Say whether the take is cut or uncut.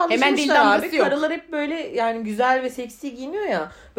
uncut